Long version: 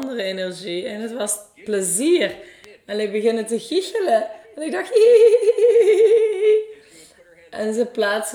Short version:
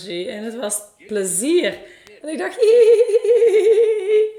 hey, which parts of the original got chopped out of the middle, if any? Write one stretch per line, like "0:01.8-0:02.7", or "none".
0:02.8-0:04.5